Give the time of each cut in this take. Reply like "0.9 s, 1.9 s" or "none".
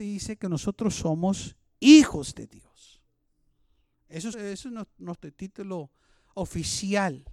4.3 s